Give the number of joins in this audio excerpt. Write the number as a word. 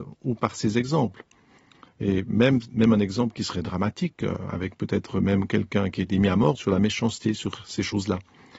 one